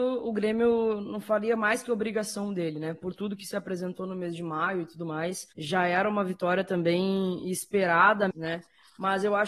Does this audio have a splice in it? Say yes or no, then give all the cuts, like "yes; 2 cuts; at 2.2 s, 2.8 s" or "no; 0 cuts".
yes; 2 cuts; at 5.5 s, 8.3 s